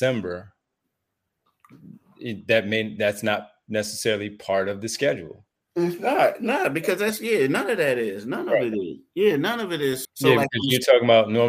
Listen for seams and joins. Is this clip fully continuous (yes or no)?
no